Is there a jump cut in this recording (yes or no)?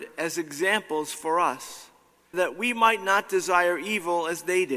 yes